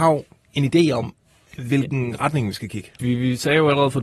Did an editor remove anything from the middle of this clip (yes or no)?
yes